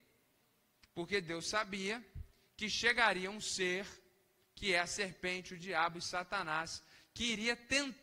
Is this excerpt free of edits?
yes; 0 cuts

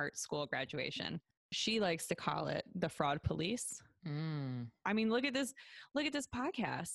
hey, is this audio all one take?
no; 1 cut; at 4.8 s

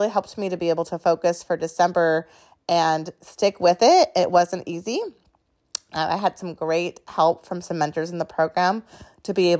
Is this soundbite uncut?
yes; 0 cuts

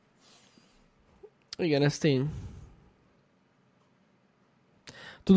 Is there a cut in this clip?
no; 0 cuts

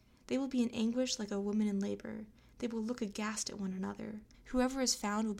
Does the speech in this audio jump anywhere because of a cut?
yes; 1 cut; at 4.3 s

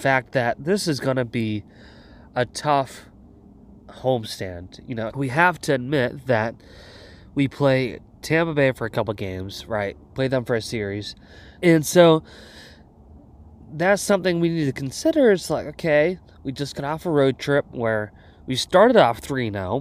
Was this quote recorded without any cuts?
no; 3 cuts; at 5.1 s, 10.0 s, 11.6 s

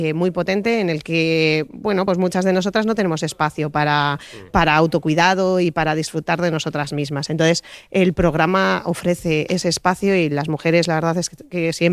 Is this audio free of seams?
yes; 0 cuts

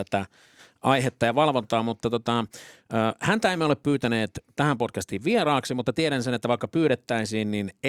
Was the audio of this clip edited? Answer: no; 0 cuts

